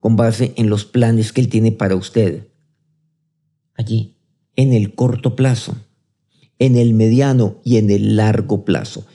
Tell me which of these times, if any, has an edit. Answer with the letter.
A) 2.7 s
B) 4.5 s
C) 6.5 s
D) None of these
B